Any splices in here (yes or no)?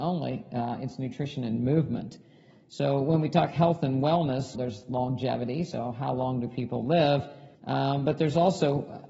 yes